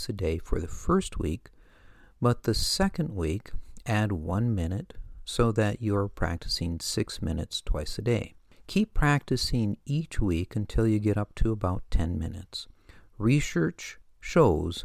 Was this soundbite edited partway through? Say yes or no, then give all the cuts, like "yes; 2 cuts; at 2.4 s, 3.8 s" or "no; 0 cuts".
no; 0 cuts